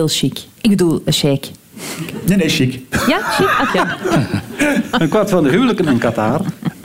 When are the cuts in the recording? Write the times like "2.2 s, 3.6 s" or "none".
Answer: 3.7 s